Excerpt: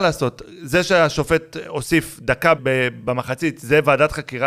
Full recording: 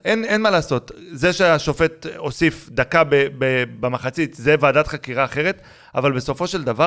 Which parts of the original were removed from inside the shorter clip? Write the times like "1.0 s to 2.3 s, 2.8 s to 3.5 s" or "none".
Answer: 3.0 s to 3.3 s